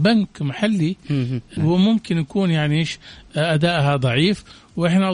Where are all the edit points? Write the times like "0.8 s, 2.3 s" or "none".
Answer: 1.6 s